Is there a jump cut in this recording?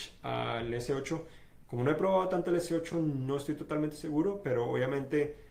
no; 0 cuts

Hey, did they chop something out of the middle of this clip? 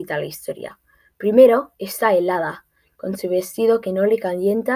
no; 0 cuts

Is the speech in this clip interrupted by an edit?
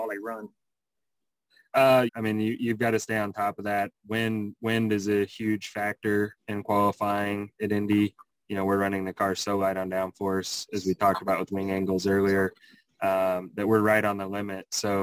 yes; 1 cut; at 2.1 s

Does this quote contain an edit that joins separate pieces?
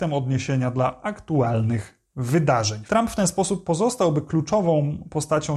yes; 1 cut; at 2.9 s

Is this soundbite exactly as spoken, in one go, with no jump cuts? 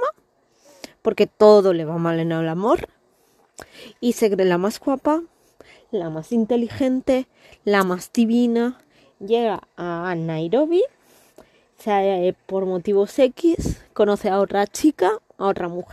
yes; 0 cuts

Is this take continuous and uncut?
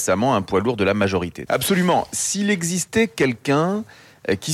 no; 1 cut; at 1.5 s

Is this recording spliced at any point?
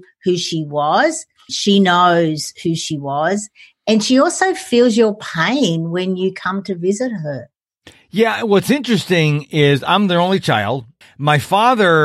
yes; 2 cuts; at 1.5 s, 11.0 s

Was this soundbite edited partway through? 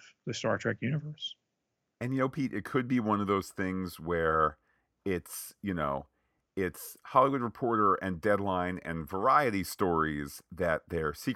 no; 0 cuts

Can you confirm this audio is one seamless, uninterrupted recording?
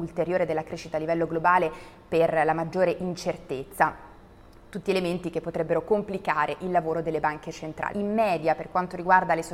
no; 1 cut; at 7.9 s

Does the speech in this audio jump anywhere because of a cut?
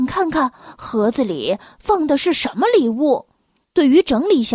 yes; 1 cut; at 3.6 s

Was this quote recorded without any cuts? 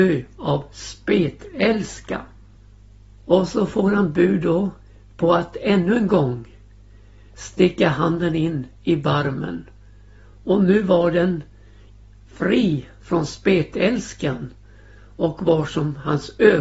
yes; 0 cuts

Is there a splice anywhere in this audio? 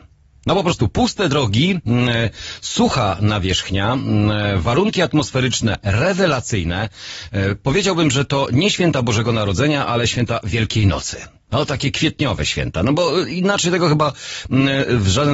no; 0 cuts

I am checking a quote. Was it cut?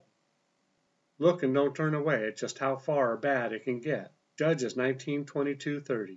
yes; 1 cut; at 4.4 s

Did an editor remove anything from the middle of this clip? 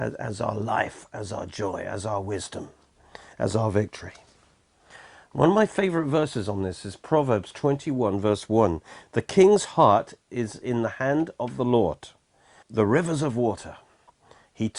yes; 1 cut; at 12.6 s

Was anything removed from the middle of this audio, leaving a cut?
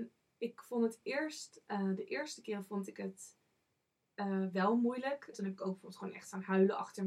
yes; 1 cut; at 5.3 s

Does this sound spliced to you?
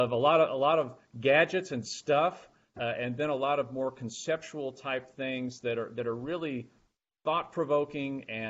no; 0 cuts

